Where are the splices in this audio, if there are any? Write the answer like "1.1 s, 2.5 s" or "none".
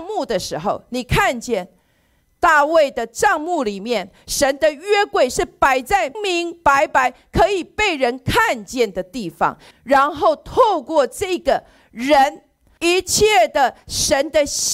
6.1 s, 9.7 s, 12.8 s